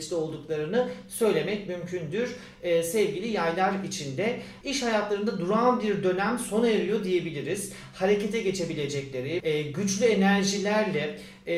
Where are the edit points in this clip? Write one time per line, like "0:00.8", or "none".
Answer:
0:04.6
0:09.4